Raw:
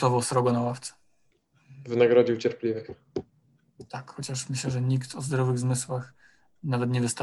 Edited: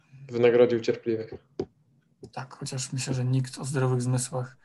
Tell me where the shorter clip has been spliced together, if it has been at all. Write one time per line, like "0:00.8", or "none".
none

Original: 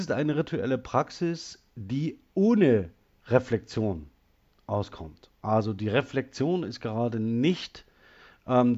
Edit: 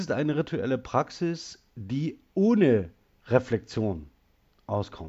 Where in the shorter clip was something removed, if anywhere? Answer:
none

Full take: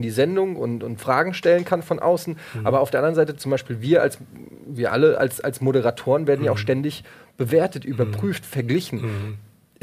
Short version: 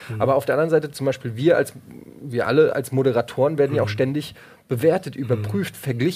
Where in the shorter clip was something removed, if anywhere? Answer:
0:02.7

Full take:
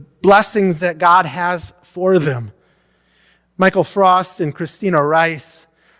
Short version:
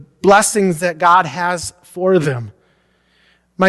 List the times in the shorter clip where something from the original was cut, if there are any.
none

